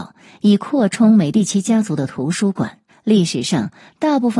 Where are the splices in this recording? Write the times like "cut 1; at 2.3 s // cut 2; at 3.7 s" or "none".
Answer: cut 1; at 2.9 s

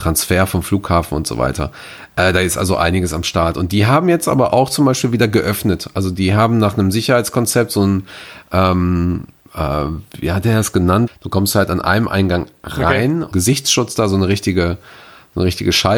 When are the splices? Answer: cut 1; at 11.1 s // cut 2; at 13.3 s

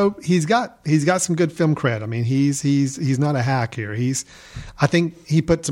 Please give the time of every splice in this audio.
none

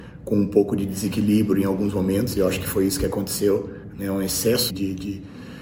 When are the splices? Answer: cut 1; at 4.7 s

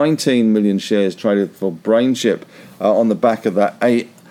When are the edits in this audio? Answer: none

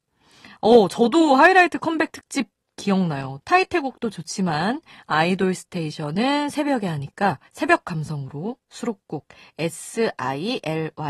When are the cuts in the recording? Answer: cut 1; at 3.4 s // cut 2; at 7.5 s

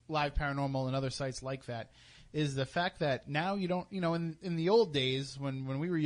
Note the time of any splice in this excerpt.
none

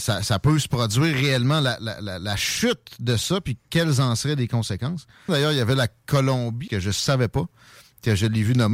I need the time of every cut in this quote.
cut 1; at 5.3 s // cut 2; at 6.7 s

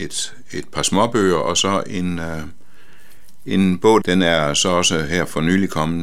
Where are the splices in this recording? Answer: cut 1; at 4.0 s

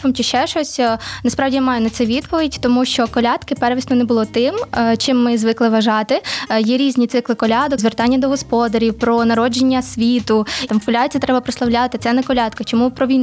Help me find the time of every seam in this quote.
cut 1; at 7.8 s // cut 2; at 10.7 s // cut 3; at 12.0 s

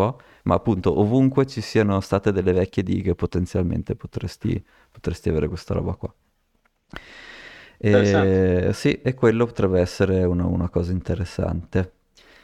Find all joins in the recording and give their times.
none

